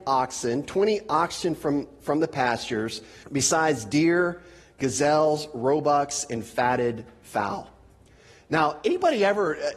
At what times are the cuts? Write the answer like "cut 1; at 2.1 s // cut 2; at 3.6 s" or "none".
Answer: cut 1; at 3.2 s